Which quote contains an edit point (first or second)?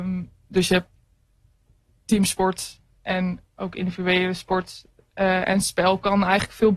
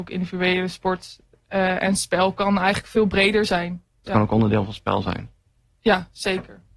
second